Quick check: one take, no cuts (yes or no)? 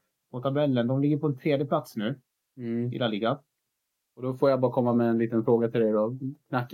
yes